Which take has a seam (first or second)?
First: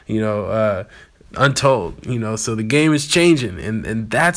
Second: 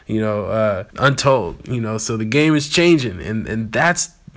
second